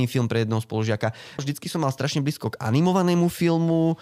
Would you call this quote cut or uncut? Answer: cut